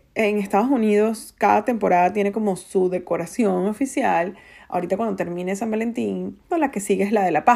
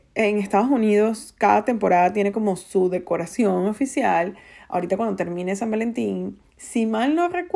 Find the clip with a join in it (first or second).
first